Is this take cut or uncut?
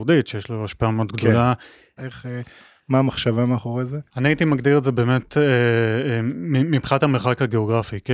cut